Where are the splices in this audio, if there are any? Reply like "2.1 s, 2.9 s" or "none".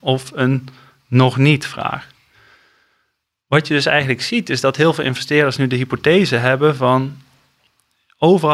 none